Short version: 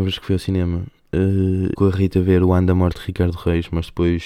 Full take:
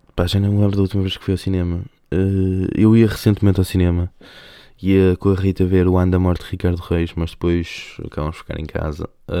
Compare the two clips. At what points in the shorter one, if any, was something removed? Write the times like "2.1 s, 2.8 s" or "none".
1.7 s